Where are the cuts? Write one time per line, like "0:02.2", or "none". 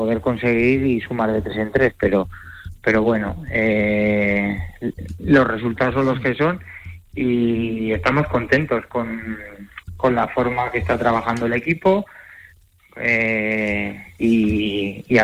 none